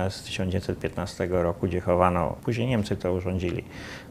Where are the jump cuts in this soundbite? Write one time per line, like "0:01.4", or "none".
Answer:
0:02.4